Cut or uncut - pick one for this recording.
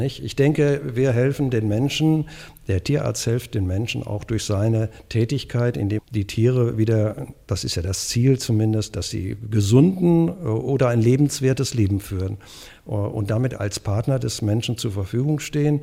cut